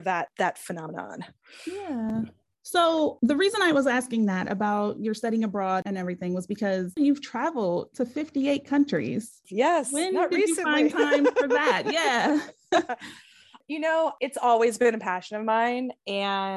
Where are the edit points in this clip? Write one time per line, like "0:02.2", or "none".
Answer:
0:09.4